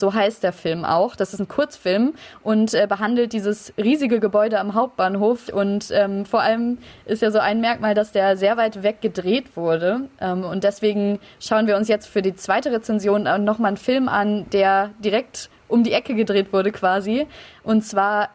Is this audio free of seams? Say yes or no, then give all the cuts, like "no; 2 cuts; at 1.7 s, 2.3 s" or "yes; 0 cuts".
no; 1 cut; at 5.5 s